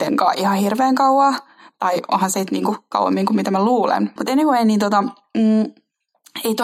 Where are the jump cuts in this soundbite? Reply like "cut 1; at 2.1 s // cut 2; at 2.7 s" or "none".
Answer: cut 1; at 4.2 s